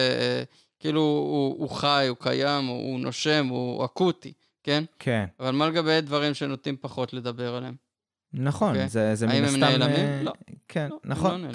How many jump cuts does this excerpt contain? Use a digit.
0